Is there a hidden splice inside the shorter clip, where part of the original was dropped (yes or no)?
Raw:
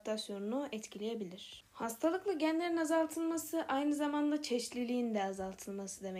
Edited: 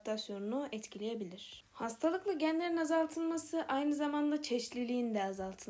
no